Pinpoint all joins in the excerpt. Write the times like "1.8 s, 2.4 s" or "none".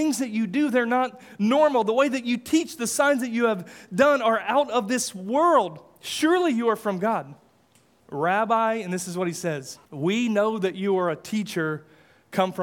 8.0 s, 9.8 s